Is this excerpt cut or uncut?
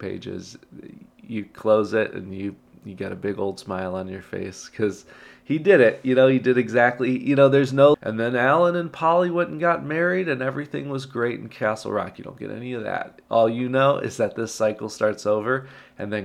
cut